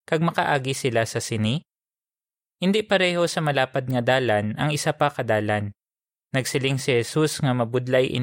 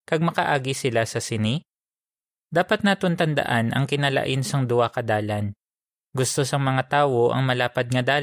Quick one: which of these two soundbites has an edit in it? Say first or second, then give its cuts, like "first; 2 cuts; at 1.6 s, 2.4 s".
second; 1 cut; at 2.4 s